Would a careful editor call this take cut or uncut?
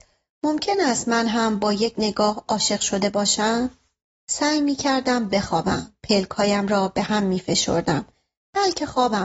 uncut